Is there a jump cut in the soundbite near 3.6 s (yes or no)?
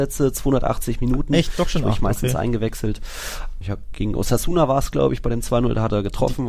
yes